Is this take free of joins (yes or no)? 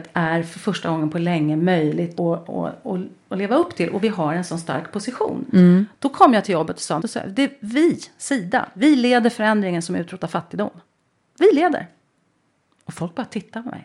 no